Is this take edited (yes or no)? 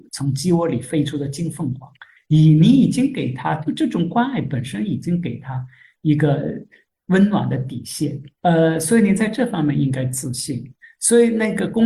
yes